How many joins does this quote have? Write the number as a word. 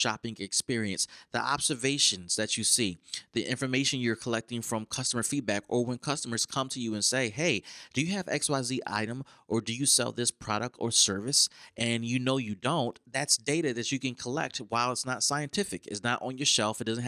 zero